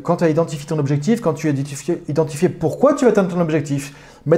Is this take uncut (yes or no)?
yes